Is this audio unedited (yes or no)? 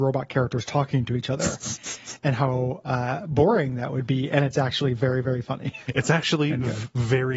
yes